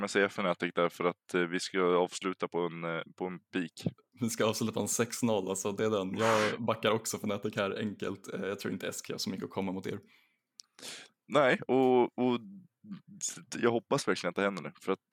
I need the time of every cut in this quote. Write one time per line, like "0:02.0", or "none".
none